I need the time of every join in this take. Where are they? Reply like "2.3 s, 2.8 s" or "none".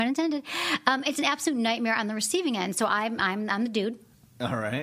2.7 s